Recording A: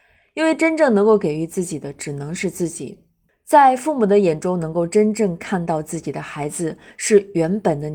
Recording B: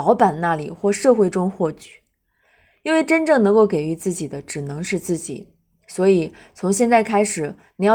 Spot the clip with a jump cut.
A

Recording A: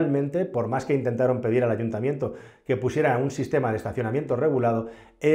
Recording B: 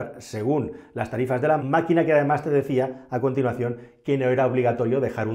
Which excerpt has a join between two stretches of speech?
B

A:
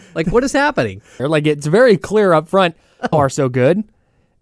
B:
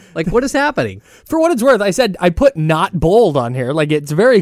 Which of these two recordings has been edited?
A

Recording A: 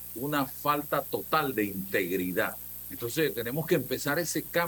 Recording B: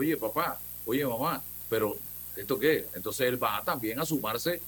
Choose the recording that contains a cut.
A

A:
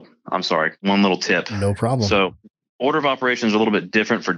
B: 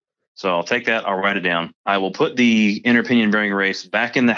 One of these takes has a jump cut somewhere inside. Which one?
B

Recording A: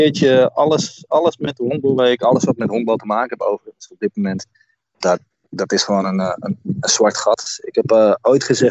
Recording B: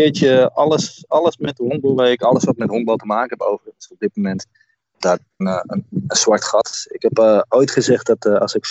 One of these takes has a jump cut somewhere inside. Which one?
B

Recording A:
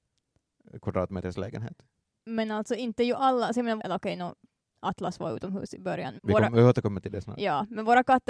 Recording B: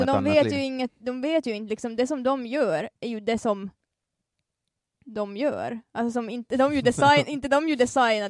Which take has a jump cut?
A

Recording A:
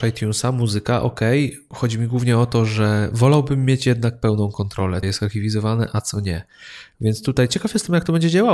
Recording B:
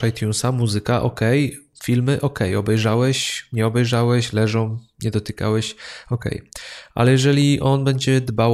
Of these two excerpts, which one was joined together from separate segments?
A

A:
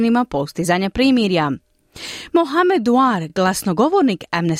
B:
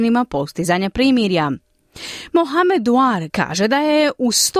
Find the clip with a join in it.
B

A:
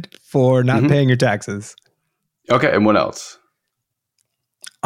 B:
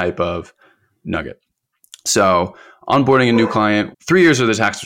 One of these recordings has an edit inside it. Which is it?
B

